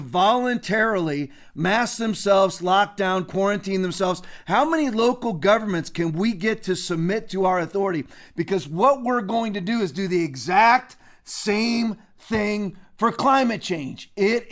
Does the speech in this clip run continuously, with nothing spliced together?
yes; 0 cuts

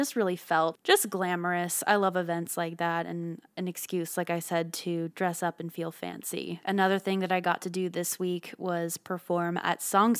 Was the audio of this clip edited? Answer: yes; 1 cut; at 5.1 s

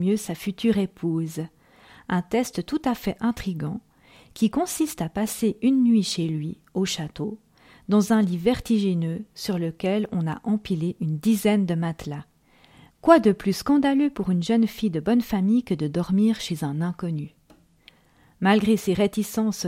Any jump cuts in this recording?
yes; 1 cut; at 12.9 s

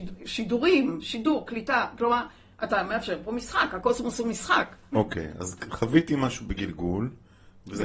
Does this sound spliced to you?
yes; 1 cut; at 4.9 s

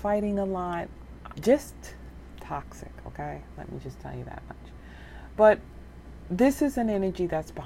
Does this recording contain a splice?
yes; 1 cut; at 1.3 s

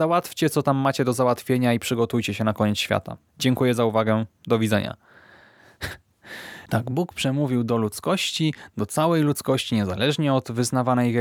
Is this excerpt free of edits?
no; 1 cut; at 3.3 s

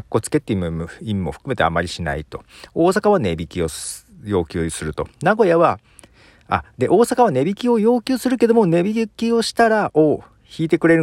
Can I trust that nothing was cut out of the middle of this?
yes; 0 cuts

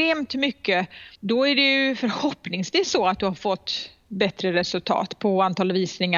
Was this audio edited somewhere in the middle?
yes; 1 cut; at 1.1 s

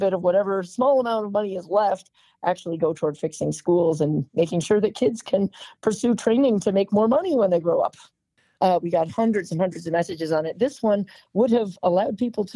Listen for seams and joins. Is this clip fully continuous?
no; 1 cut; at 8.6 s

